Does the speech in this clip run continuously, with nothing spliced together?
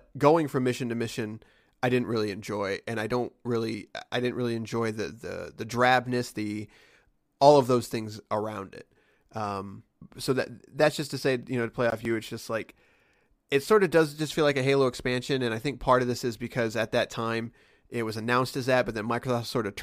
no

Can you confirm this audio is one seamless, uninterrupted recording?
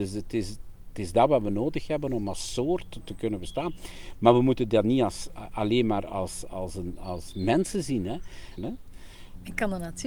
no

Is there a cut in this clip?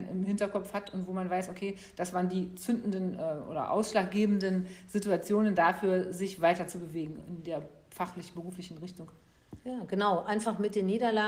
no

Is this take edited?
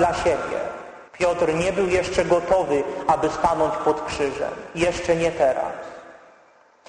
yes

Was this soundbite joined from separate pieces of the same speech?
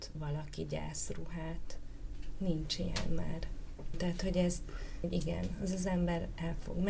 yes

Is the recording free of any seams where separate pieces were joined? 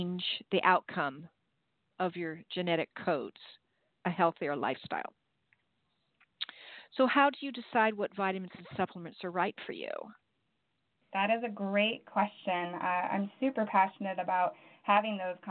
yes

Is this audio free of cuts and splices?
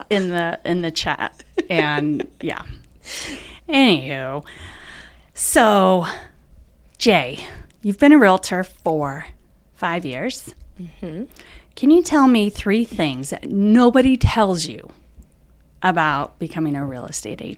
yes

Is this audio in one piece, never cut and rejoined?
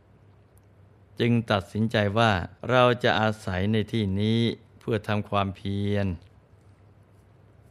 no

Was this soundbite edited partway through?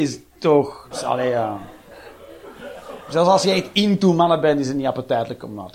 yes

